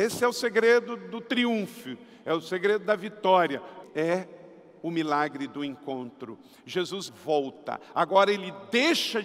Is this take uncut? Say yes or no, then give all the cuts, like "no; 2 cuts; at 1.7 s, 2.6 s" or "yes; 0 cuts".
no; 2 cuts; at 3.8 s, 7.1 s